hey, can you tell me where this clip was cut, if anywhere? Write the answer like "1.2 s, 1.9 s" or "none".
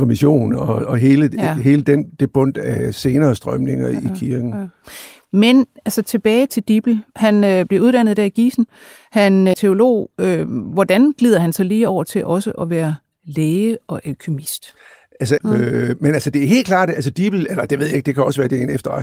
6.5 s, 9.5 s, 15.4 s